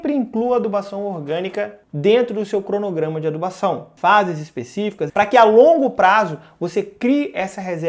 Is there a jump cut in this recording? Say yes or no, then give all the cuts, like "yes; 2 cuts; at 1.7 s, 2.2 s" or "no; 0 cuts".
yes; 1 cut; at 5.1 s